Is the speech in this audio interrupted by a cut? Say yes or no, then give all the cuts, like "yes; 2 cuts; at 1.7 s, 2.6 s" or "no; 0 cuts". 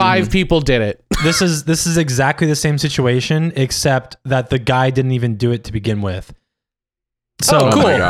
no; 0 cuts